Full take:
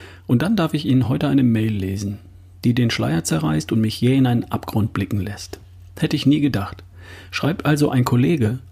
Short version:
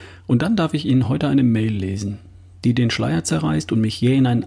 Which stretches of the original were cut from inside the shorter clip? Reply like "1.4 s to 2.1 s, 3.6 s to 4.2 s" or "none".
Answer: none